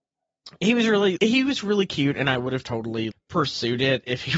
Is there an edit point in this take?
yes; 2 cuts; at 1.2 s, 3.1 s

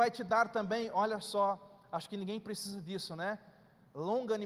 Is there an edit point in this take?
no; 0 cuts

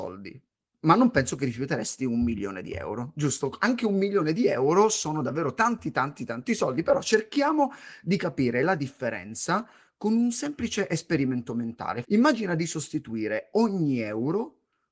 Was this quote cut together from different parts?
yes; 1 cut; at 12.0 s

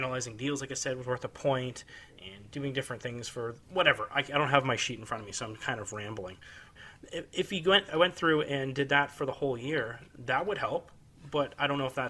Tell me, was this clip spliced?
yes; 1 cut; at 3.6 s

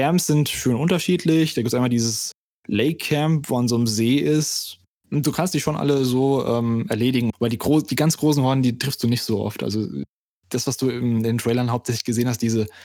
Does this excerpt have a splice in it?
yes; 1 cut; at 5.0 s

